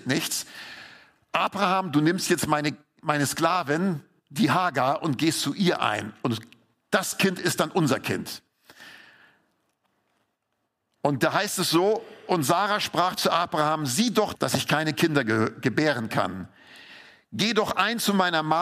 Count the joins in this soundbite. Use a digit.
1